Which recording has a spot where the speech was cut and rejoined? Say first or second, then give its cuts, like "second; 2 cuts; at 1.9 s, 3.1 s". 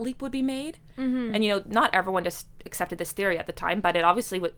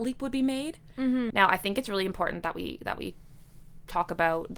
second; 1 cut; at 1.3 s